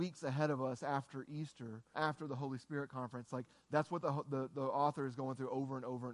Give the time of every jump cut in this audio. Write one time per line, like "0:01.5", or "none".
0:01.9